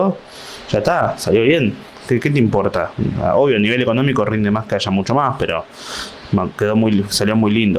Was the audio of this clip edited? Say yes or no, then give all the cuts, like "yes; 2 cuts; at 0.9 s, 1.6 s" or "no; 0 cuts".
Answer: no; 0 cuts